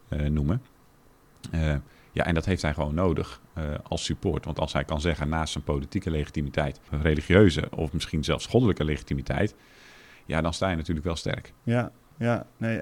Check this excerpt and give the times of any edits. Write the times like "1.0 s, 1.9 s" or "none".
6.9 s